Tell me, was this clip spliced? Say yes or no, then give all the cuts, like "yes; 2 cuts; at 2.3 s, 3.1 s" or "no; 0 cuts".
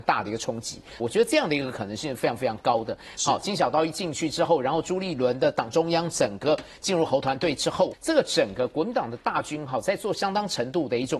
yes; 3 cuts; at 1.0 s, 3.2 s, 7.9 s